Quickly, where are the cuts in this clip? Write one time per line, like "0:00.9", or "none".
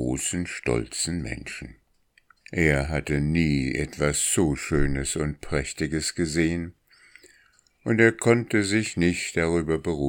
0:02.4